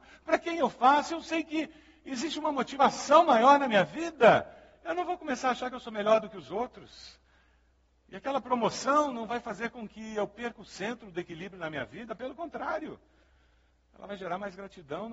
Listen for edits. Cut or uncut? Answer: uncut